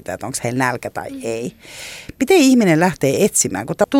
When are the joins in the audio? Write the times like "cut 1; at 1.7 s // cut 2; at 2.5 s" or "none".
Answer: none